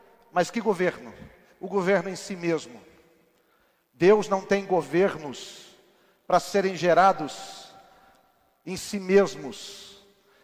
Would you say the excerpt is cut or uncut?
uncut